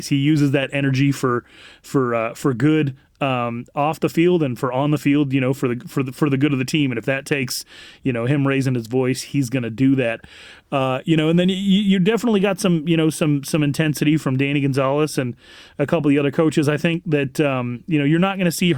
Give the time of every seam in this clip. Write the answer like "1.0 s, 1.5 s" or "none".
none